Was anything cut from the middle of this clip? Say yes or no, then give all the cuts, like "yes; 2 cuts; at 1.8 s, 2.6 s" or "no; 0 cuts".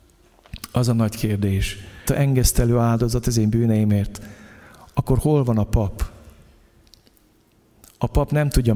yes; 1 cut; at 2.1 s